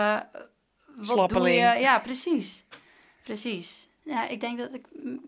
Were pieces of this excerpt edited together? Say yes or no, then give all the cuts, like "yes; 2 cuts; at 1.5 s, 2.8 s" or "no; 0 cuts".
yes; 1 cut; at 4.0 s